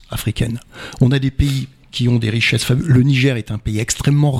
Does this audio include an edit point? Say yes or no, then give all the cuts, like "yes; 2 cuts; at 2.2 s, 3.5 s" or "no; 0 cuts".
no; 0 cuts